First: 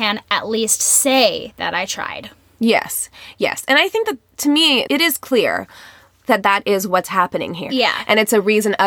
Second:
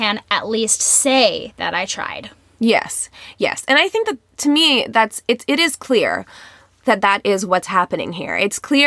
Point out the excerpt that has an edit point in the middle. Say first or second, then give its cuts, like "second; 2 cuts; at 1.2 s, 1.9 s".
first; 2 cuts; at 4.9 s, 7.7 s